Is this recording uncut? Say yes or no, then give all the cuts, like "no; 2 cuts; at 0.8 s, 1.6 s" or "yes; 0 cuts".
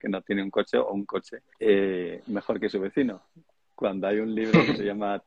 no; 1 cut; at 1.5 s